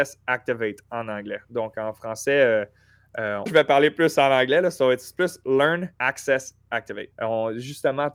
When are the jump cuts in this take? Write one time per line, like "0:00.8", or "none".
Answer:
0:03.5
0:05.9
0:07.1